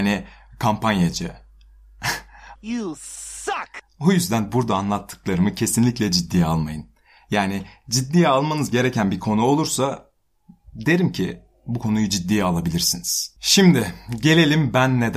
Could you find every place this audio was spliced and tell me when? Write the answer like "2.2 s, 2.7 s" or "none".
2.6 s, 13.4 s